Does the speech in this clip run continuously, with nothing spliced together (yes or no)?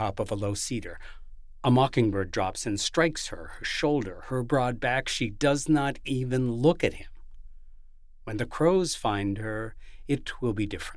yes